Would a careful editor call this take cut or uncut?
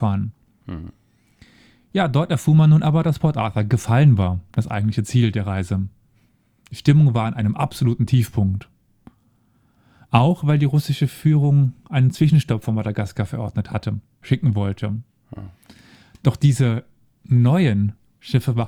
cut